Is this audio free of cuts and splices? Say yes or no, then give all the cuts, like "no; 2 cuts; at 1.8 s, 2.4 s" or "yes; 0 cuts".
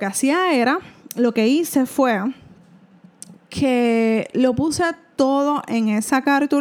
yes; 0 cuts